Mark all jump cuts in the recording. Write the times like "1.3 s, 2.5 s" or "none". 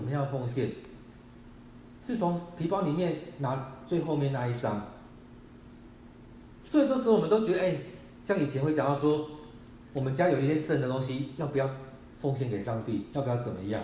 6.6 s